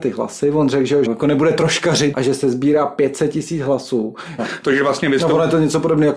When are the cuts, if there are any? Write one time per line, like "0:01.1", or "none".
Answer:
0:01.0
0:02.1
0:04.4